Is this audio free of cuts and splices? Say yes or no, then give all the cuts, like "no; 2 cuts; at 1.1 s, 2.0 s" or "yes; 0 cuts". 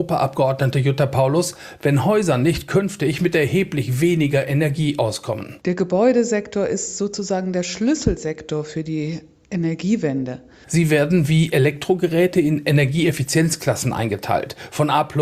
no; 1 cut; at 10.6 s